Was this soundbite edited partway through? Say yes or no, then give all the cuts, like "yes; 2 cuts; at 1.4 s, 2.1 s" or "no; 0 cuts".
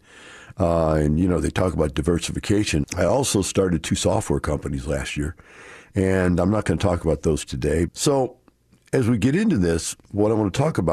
yes; 2 cuts; at 2.8 s, 7.9 s